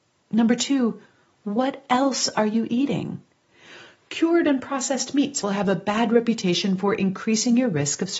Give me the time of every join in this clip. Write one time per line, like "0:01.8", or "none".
0:05.4